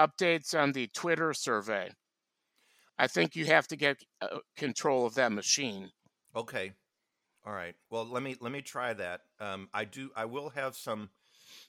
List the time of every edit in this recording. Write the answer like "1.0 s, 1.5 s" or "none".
2.9 s